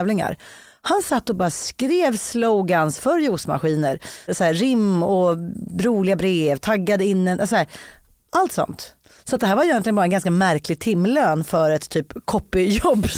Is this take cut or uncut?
cut